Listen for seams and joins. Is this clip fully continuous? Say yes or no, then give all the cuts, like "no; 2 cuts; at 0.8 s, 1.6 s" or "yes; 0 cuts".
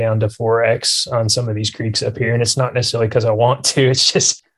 yes; 0 cuts